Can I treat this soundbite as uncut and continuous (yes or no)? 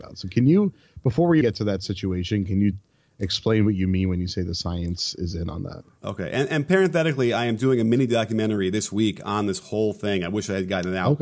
no